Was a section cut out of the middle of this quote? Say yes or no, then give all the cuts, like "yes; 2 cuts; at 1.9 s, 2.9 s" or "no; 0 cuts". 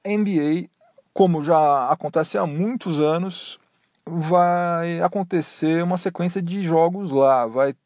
no; 0 cuts